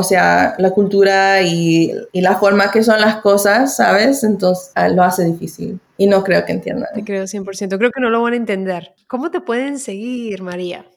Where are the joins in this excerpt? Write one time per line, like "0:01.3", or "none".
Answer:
none